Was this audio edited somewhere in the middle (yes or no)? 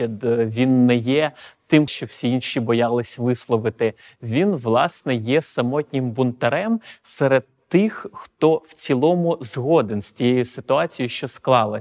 yes